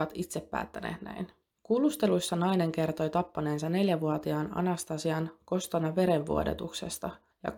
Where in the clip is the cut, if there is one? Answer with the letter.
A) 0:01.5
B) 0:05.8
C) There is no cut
C